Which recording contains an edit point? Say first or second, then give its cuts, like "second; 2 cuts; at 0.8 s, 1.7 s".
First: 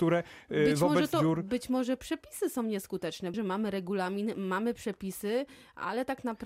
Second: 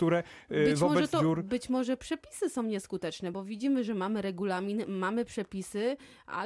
first; 1 cut; at 3.3 s